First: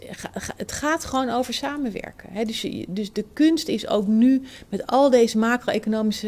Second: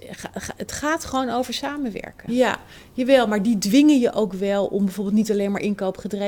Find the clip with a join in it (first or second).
second